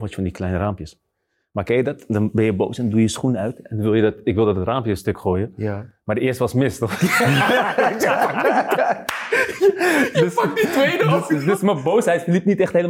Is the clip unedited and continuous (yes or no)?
yes